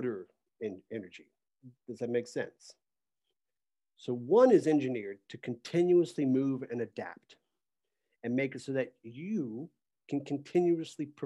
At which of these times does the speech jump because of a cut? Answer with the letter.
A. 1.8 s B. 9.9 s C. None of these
B